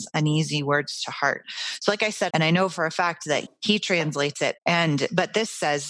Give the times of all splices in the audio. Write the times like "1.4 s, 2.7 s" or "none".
2.3 s, 3.5 s, 4.6 s